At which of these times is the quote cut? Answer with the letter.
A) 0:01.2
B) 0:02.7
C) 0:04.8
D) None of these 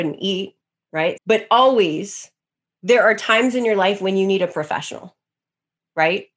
A